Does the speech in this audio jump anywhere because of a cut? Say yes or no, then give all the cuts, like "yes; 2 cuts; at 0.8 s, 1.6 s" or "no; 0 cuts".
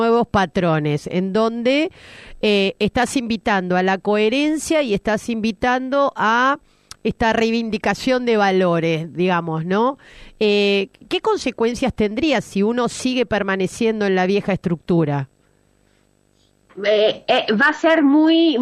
no; 0 cuts